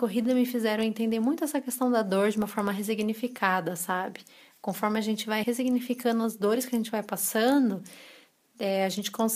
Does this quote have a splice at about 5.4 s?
yes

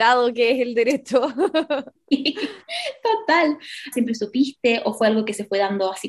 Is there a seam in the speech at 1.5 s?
no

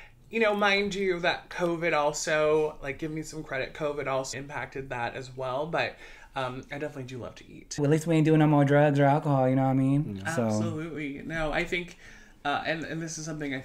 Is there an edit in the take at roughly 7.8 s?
yes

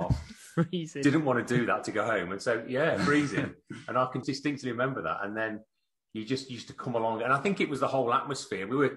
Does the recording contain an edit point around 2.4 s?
no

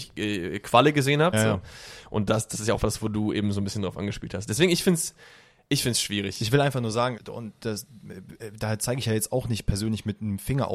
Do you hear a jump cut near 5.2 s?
no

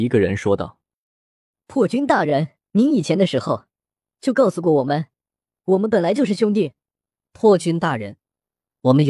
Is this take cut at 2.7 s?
yes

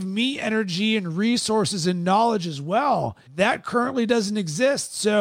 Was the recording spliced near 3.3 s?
yes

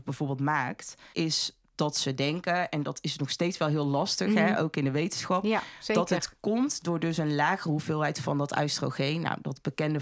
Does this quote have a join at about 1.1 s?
yes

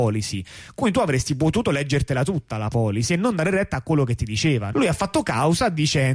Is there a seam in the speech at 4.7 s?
yes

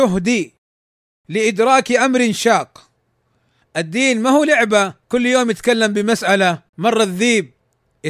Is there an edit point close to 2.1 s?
no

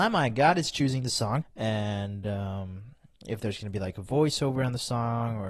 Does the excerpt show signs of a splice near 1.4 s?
yes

